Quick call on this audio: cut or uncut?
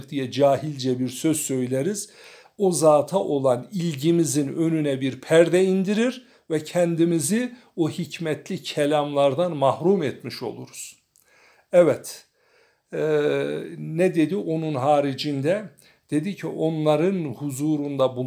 uncut